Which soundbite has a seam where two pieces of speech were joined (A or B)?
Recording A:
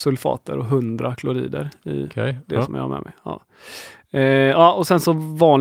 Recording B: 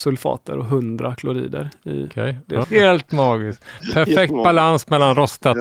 B